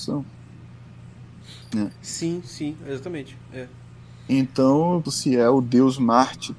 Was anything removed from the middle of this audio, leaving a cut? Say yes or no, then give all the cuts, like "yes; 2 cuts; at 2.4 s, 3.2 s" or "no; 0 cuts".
yes; 1 cut; at 5.1 s